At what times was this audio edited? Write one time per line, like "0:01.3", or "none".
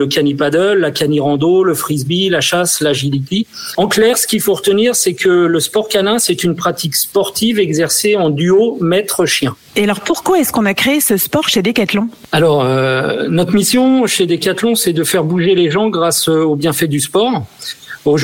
none